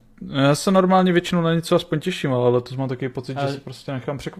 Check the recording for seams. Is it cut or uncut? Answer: uncut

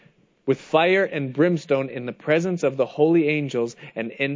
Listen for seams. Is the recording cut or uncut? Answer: uncut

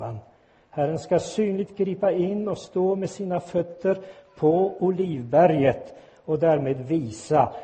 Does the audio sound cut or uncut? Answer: uncut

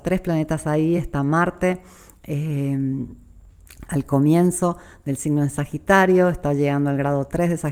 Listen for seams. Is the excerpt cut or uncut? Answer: uncut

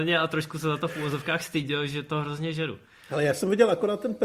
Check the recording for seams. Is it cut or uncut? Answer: uncut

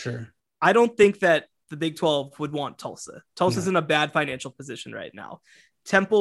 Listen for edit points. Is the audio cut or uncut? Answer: uncut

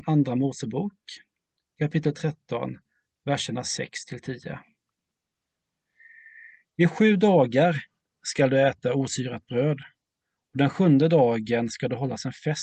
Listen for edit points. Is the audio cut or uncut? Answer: uncut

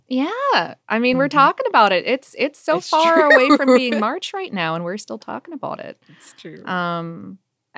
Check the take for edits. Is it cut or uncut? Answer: uncut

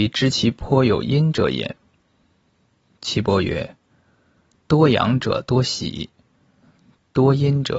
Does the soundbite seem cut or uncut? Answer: uncut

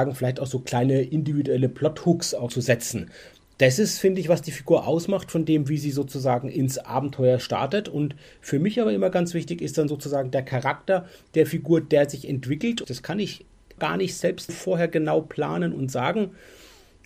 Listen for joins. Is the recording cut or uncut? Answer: cut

